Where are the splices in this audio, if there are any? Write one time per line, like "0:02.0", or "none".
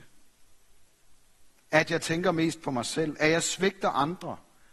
0:01.7